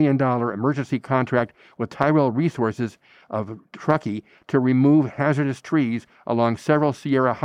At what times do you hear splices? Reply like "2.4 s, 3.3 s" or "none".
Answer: none